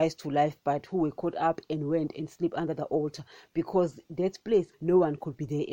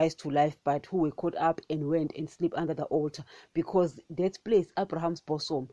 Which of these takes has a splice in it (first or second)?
first